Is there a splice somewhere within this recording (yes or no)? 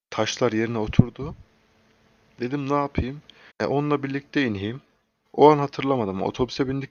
yes